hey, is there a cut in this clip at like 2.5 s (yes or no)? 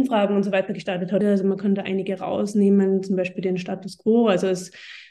no